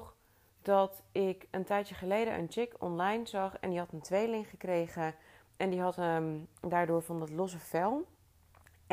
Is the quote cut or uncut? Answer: uncut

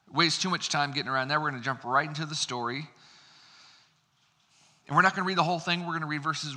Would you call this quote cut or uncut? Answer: uncut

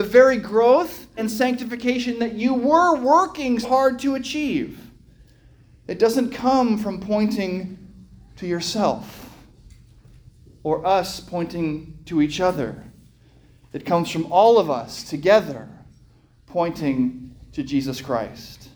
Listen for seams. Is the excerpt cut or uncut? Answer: cut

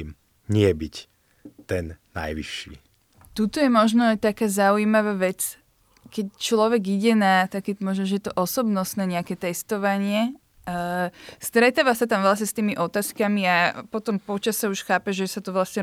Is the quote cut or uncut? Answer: uncut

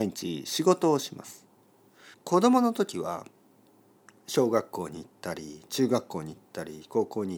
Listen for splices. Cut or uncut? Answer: cut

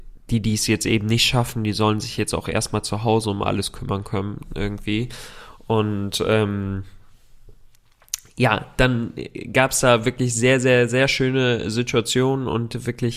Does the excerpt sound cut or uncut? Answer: uncut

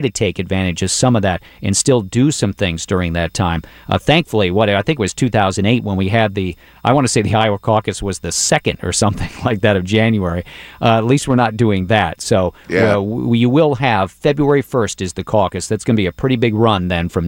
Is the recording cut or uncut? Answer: uncut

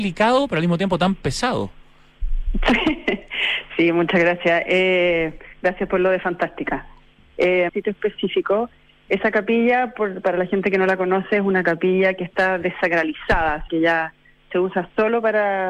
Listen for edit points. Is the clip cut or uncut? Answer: cut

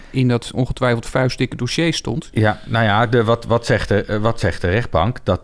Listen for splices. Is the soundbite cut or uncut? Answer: uncut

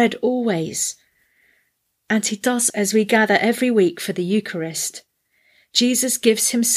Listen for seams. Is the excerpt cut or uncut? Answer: cut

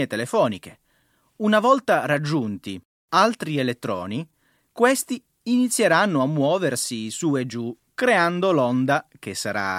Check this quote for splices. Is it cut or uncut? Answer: uncut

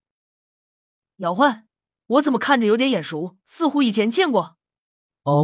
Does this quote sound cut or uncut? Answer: cut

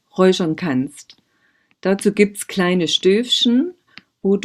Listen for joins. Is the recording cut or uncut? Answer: uncut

